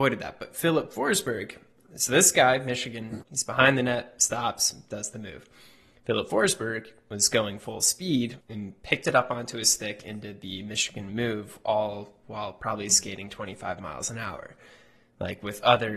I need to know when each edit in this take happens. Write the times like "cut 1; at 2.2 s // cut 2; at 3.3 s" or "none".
cut 1; at 3.2 s // cut 2; at 8.4 s